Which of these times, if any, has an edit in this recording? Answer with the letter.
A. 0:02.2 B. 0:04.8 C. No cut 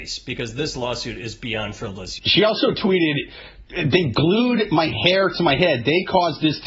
A